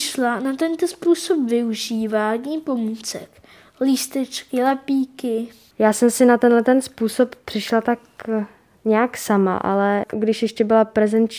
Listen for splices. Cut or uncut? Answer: uncut